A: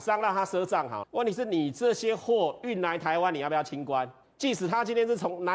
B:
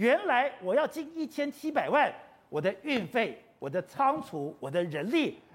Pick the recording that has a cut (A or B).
A